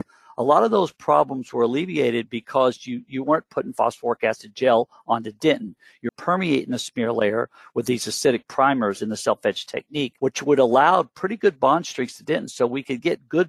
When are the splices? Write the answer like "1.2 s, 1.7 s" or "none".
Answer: 6.1 s, 10.2 s